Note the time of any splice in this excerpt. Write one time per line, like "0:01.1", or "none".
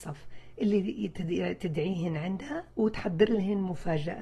0:02.7